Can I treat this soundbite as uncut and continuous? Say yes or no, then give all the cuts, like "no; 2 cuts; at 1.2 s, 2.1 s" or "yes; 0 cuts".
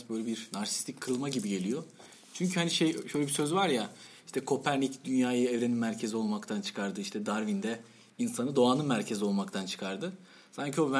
yes; 0 cuts